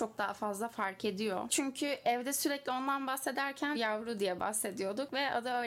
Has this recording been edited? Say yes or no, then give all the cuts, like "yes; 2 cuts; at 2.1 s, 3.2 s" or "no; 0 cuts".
yes; 2 cuts; at 1.5 s, 3.8 s